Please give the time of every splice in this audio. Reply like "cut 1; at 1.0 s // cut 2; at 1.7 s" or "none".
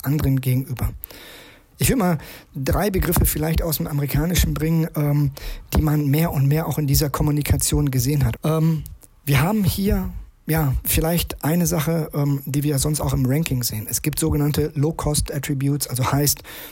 cut 1; at 1.7 s // cut 2; at 8.3 s